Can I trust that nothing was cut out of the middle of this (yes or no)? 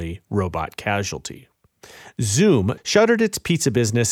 no